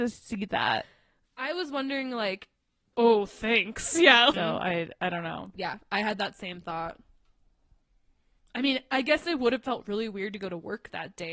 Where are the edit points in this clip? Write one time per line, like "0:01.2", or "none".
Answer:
0:02.9
0:04.3